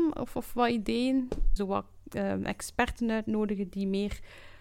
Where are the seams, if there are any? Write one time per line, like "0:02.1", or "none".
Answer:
0:01.6